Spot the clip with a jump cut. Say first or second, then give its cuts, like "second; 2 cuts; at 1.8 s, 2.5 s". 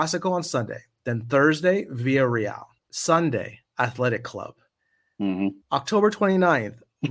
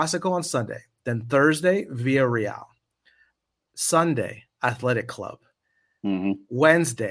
first; 2 cuts; at 2.8 s, 5.6 s